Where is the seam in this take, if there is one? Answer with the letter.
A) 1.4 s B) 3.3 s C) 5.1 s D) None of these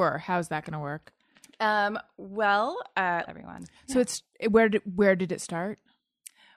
B